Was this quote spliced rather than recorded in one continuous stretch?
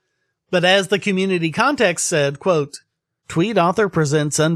no; 0 cuts

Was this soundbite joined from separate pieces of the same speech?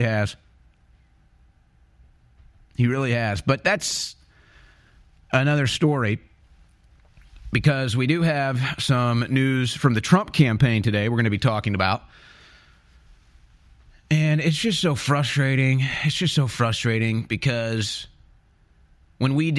no; 0 cuts

